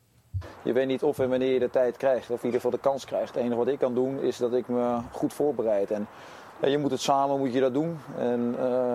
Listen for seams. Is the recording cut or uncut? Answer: uncut